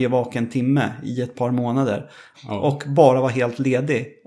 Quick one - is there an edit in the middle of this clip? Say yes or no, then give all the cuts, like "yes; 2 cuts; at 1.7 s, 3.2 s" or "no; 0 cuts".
yes; 1 cut; at 2.3 s